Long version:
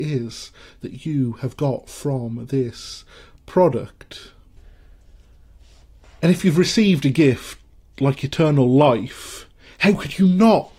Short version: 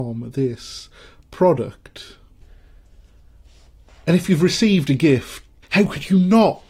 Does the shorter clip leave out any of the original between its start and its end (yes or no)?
yes